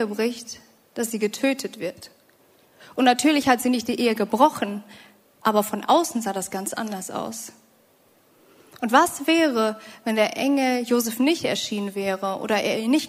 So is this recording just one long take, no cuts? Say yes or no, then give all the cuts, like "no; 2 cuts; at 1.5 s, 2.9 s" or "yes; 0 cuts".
yes; 0 cuts